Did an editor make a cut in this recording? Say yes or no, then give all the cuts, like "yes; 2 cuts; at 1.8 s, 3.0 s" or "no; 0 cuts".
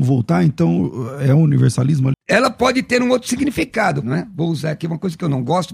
yes; 2 cuts; at 2.1 s, 4.0 s